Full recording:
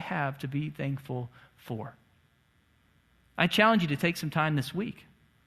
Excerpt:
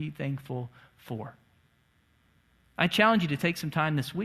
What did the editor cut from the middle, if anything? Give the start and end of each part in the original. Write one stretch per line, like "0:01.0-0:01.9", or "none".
none